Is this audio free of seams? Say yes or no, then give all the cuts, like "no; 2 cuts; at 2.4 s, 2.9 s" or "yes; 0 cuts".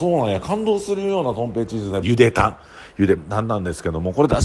no; 2 cuts; at 2.0 s, 3.2 s